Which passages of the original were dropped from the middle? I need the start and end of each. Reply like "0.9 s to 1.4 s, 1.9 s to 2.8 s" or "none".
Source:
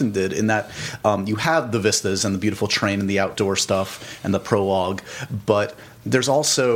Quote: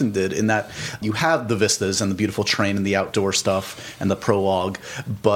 1.0 s to 1.3 s